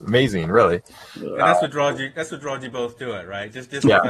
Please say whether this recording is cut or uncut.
uncut